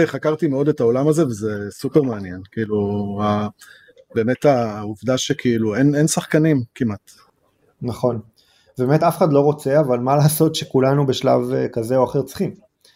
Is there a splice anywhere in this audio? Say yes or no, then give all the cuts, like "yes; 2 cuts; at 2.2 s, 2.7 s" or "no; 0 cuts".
no; 0 cuts